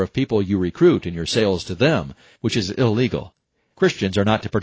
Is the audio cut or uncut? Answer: cut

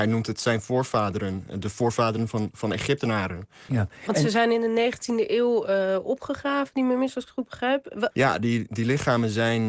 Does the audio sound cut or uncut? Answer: cut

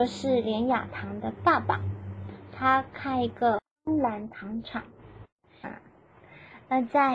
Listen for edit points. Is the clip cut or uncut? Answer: cut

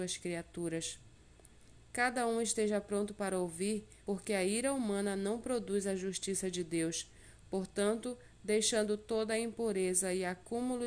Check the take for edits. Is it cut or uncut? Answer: cut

